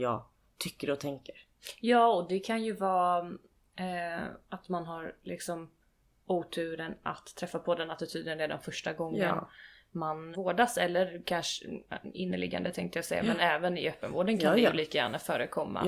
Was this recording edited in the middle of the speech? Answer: yes; 1 cut; at 10.3 s

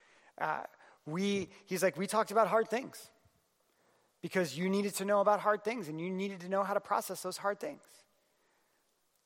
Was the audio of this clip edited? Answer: no; 0 cuts

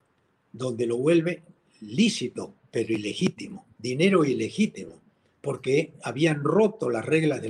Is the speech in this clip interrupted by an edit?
yes; 1 cut; at 3.8 s

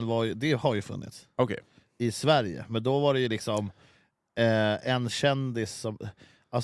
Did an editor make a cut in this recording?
no; 0 cuts

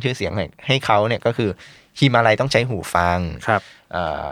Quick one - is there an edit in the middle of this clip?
no; 0 cuts

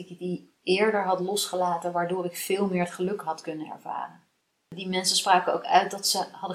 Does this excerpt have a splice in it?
no; 0 cuts

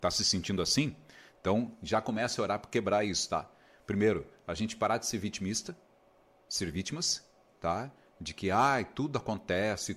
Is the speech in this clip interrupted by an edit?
no; 0 cuts

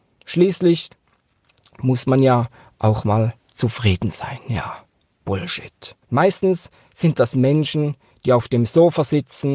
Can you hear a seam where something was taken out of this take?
yes; 1 cut; at 6.0 s

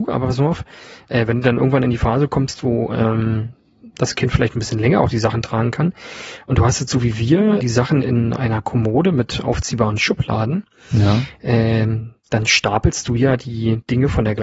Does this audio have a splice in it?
yes; 1 cut; at 7.6 s

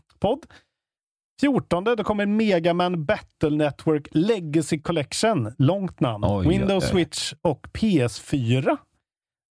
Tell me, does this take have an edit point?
no; 0 cuts

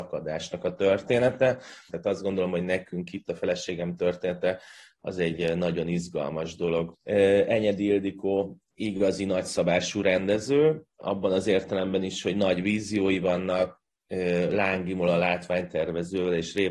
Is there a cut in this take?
yes; 2 cuts; at 1.9 s, 6.9 s

